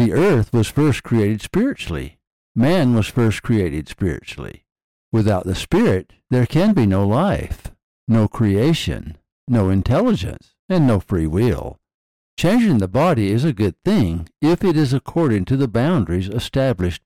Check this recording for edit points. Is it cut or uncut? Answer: uncut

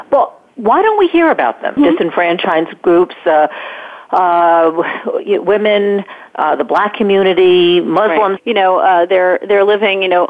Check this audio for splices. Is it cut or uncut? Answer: cut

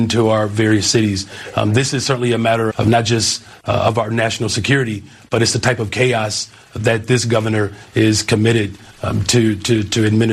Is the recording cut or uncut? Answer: cut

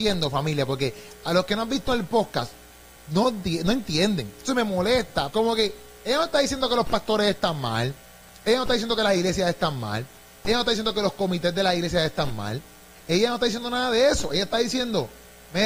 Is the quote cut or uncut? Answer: cut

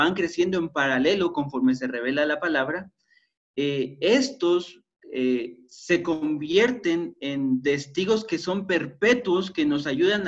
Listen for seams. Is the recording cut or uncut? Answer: uncut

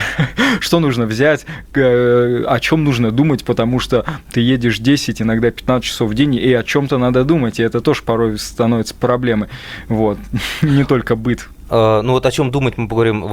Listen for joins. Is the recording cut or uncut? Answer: uncut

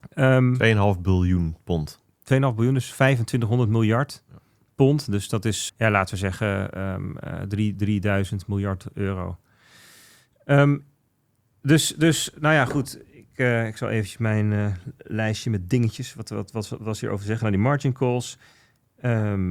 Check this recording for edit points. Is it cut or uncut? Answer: cut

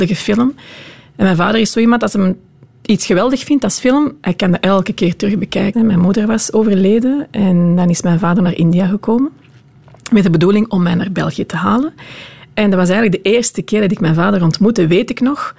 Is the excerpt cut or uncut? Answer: cut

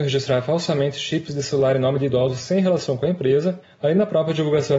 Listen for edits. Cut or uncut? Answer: cut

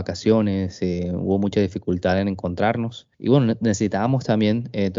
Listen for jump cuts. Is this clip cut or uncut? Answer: cut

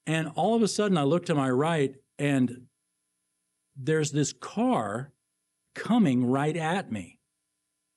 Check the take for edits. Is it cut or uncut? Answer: uncut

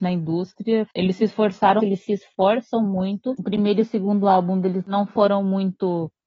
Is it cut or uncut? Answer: cut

